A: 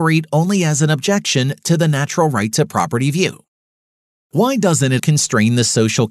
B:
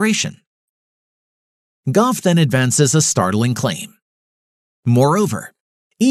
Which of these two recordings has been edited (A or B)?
A